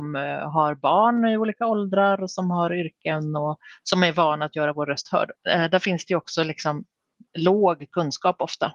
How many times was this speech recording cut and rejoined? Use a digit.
1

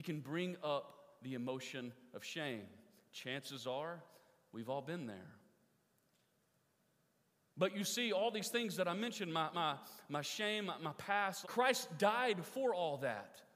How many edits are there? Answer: 2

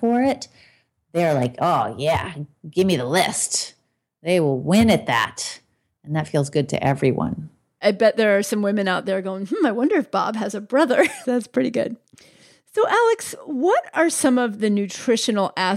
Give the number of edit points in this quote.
1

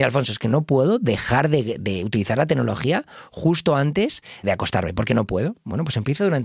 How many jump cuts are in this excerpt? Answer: 1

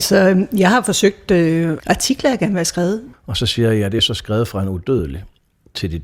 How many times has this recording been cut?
2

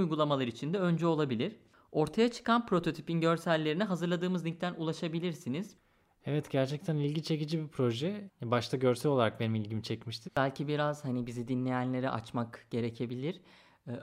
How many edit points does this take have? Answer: 1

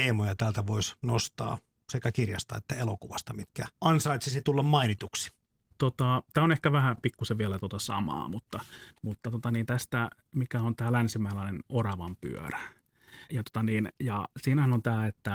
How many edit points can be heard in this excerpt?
2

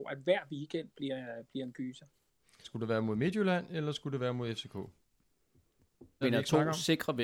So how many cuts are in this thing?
2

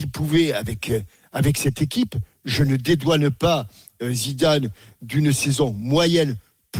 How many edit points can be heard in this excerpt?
0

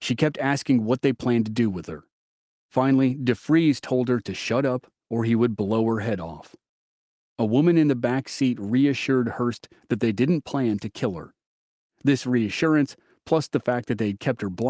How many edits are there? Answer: 0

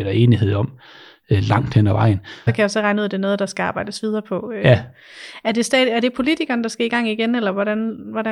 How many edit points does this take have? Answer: 1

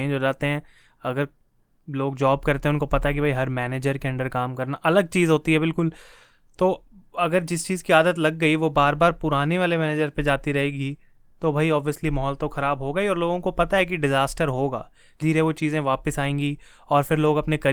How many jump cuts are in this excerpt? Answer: 1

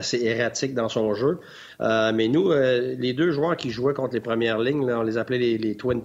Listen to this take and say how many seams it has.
0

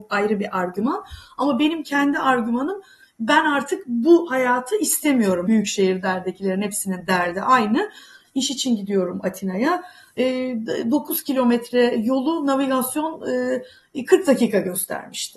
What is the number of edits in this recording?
2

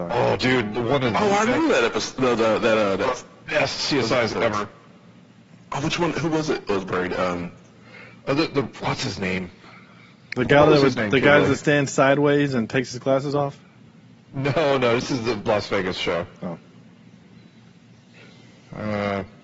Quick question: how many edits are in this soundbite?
0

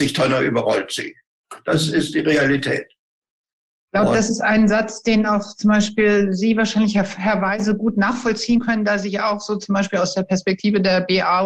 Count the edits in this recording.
0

